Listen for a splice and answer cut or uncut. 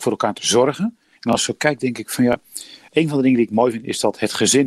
cut